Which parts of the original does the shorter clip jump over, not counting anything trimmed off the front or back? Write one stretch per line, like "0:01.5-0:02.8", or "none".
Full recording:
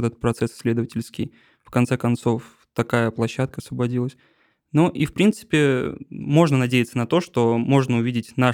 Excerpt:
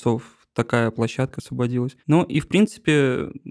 0:04.2-0:04.7

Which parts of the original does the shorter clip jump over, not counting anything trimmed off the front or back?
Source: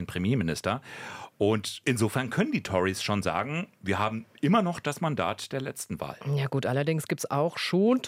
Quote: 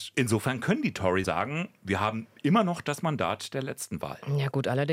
0:02.9-0:03.2

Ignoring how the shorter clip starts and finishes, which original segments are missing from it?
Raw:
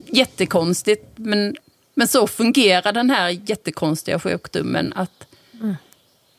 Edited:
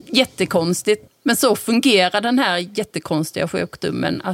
0:01.1-0:01.8

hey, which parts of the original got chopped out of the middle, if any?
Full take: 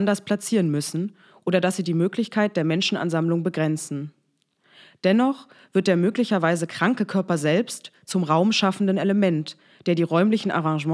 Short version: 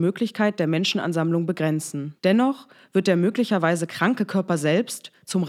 0:04.2-0:05.0

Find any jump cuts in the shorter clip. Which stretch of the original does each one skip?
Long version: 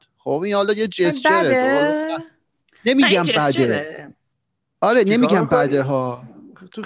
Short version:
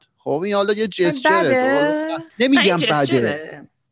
0:02.3-0:02.8

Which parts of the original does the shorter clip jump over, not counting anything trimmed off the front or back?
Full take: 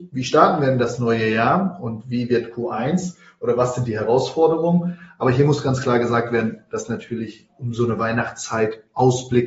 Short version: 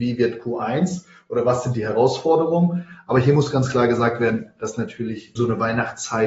0:07.5-0:07.7

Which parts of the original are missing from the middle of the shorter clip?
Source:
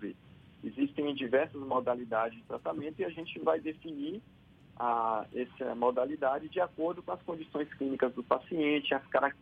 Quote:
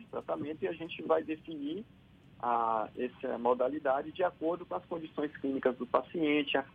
none

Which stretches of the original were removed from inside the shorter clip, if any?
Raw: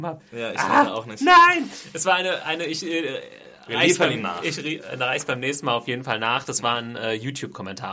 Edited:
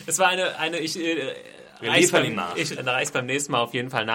0:04.6-0:04.9

